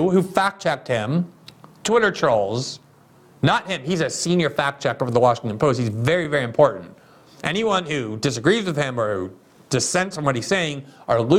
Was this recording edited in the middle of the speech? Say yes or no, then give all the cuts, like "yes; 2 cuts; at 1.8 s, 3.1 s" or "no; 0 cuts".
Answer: no; 0 cuts